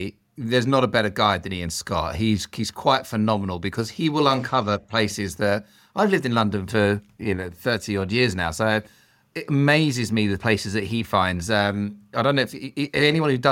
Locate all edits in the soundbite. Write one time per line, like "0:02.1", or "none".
0:09.3